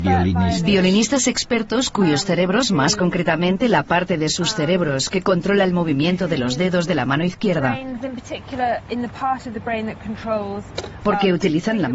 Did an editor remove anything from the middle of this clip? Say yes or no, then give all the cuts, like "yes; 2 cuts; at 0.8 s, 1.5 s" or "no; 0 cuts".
no; 0 cuts